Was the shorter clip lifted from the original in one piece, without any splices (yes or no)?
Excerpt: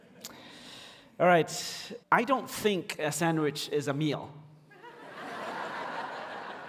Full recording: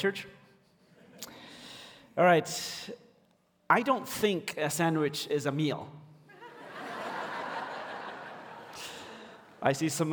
no